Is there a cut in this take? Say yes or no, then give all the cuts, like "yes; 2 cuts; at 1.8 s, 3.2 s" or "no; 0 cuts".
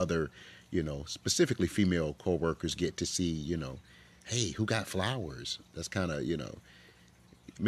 no; 0 cuts